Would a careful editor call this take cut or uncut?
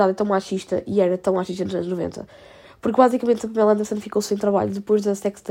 uncut